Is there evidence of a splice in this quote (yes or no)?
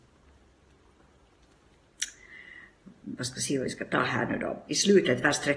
no